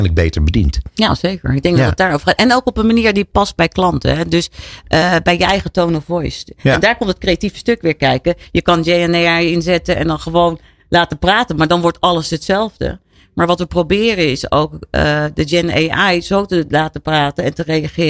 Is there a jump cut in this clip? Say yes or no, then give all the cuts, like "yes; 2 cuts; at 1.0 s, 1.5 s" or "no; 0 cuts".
no; 0 cuts